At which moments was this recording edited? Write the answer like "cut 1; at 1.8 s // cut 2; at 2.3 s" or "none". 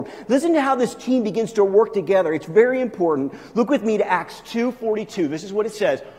none